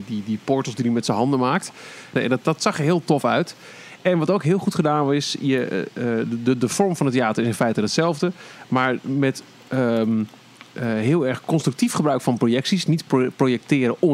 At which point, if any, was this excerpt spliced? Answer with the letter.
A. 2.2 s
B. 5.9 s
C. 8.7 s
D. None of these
A